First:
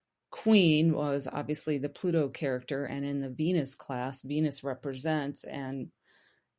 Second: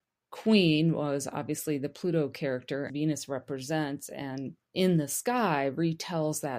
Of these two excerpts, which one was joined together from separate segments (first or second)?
second